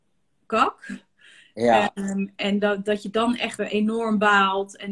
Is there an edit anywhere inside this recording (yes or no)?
yes